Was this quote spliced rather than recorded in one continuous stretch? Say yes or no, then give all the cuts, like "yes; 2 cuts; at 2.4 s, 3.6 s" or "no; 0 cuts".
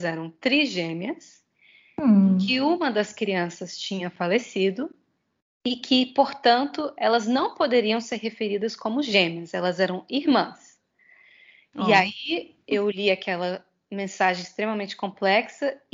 no; 0 cuts